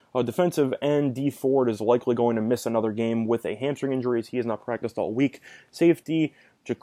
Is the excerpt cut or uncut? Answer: uncut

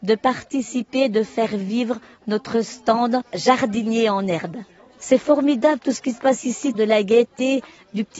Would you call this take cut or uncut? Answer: cut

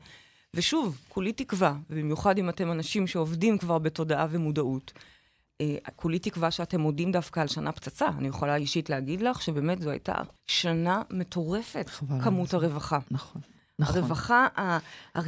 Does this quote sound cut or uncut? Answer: cut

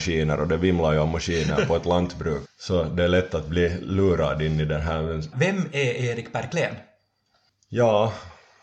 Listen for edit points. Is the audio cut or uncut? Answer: cut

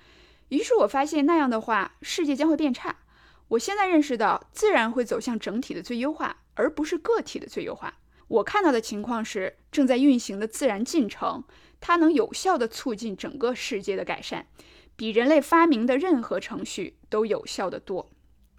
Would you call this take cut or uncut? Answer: cut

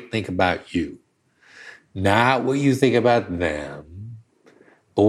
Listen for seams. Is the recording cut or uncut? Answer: uncut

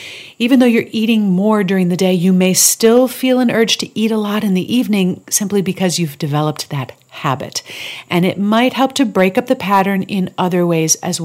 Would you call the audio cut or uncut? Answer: uncut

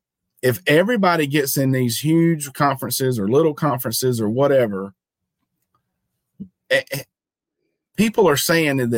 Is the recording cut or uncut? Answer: uncut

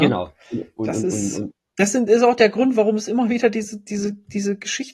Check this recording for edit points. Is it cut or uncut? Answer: uncut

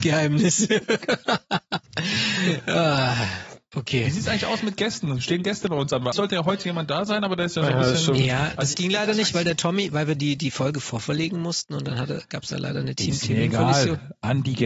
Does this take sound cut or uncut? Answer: cut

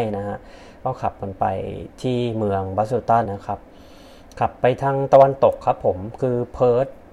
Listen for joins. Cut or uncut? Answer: cut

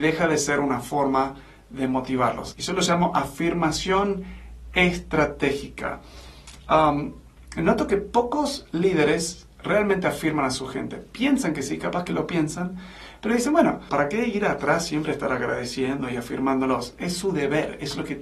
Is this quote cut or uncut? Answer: cut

